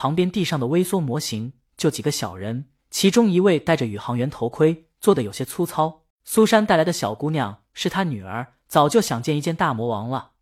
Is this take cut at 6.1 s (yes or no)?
yes